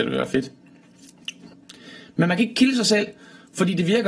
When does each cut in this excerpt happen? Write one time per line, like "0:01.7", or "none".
none

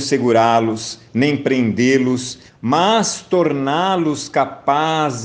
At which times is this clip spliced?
0:02.5

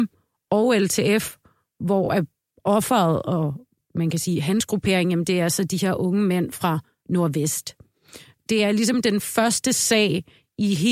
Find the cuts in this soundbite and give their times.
none

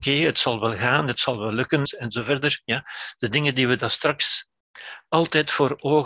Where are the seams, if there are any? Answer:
0:01.9

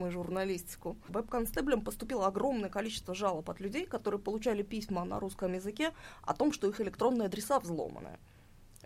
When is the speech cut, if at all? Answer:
0:01.1

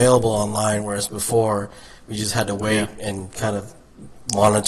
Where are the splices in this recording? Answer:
none

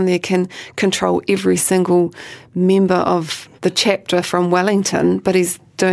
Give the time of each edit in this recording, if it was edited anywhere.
0:03.6

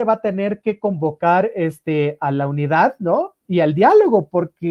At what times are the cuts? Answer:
none

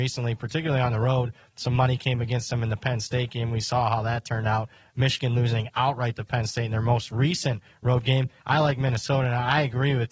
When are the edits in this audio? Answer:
0:08.4

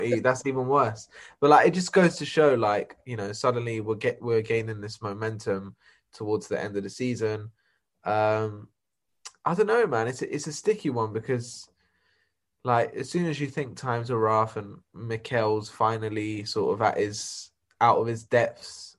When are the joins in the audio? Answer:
none

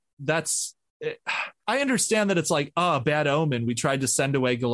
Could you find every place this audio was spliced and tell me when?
none

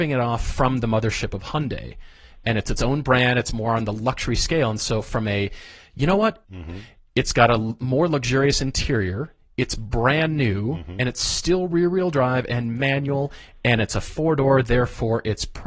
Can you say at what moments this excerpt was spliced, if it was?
0:06.4

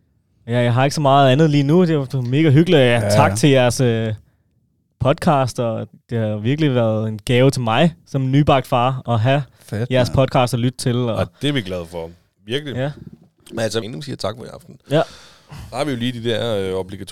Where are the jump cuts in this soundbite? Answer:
0:13.8

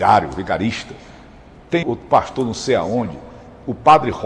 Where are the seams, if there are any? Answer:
0:01.8

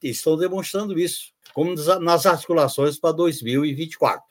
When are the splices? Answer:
0:01.4

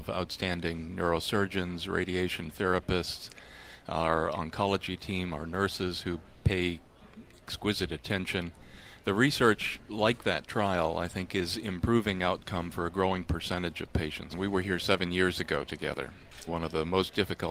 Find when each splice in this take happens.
0:09.0
0:14.3
0:16.5

